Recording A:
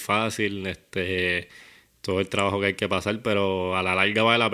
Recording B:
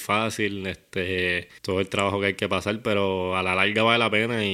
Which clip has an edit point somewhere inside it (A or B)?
B